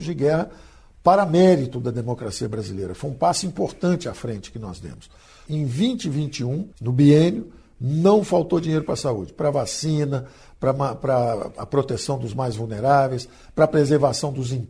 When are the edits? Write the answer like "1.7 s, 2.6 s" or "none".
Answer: 5.5 s, 6.7 s